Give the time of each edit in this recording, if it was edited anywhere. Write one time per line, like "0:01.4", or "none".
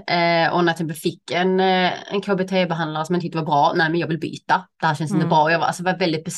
none